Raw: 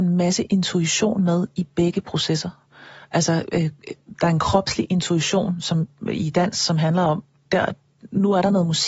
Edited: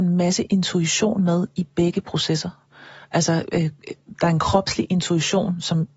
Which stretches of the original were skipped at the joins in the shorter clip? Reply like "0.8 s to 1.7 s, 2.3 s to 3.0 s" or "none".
none

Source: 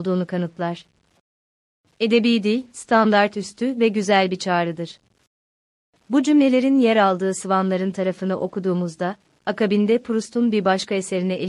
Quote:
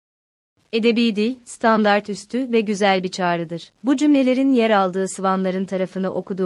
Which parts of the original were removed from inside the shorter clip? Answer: 5.0 s to 6.0 s

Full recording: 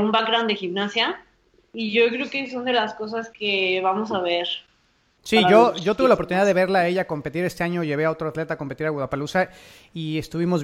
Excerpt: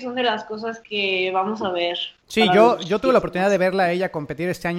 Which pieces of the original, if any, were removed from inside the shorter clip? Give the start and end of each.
4.7 s to 5.1 s

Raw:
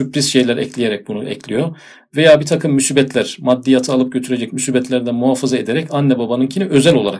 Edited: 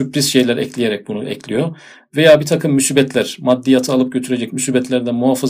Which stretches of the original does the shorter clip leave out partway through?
none

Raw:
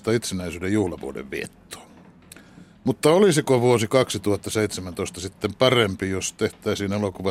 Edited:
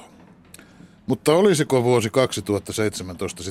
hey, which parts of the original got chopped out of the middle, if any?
none

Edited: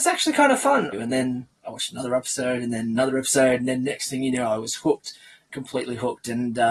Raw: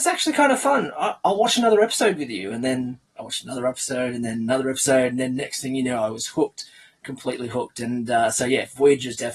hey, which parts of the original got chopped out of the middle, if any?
0.9 s to 2.4 s

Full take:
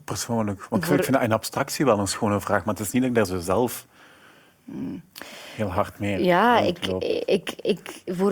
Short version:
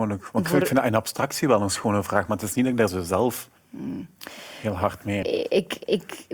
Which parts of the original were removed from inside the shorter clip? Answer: 3.9 s to 4.5 s, 6.2 s to 7.0 s

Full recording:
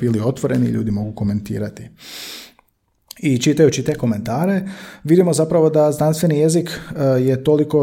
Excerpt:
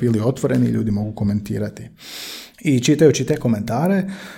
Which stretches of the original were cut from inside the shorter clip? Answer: 2.5 s to 3.1 s

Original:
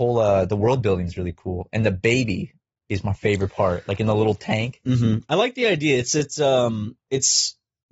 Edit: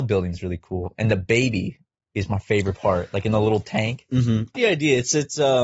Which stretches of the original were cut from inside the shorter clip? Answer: 5.3 s to 5.5 s

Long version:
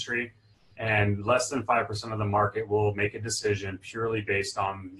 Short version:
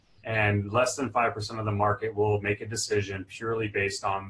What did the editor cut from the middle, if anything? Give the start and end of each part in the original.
none

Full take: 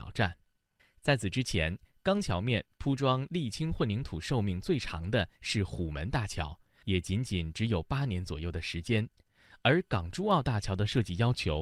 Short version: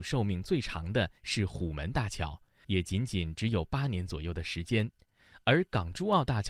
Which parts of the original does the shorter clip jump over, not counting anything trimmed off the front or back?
none

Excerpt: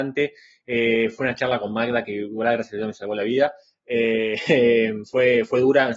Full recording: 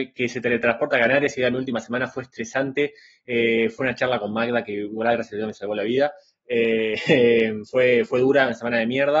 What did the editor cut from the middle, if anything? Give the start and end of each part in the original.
none

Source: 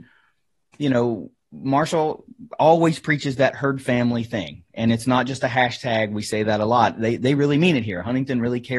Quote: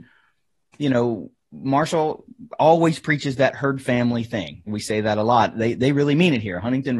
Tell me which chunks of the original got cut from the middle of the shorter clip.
4.7 s to 6.1 s

